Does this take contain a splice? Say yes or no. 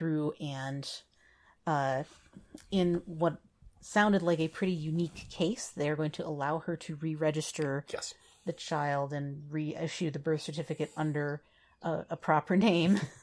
no